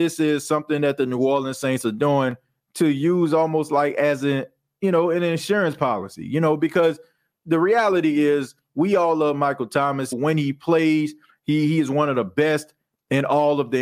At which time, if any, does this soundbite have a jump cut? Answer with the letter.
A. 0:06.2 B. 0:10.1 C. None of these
B